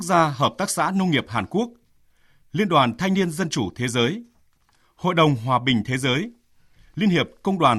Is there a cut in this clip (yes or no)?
no